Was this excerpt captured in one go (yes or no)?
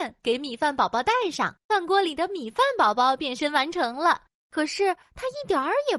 no